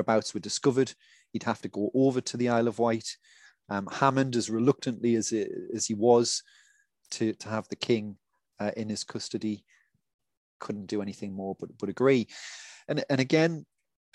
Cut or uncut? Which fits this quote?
uncut